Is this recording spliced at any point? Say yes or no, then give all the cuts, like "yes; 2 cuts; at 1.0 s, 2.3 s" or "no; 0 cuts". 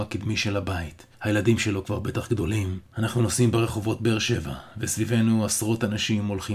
yes; 2 cuts; at 1.1 s, 2.9 s